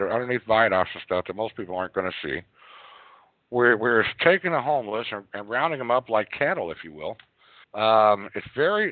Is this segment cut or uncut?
cut